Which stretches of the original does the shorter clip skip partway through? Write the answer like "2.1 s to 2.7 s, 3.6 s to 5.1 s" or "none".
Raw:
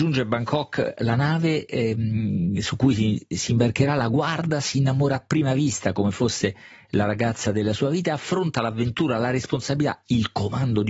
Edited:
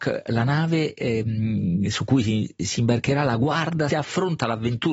4.6 s to 8.0 s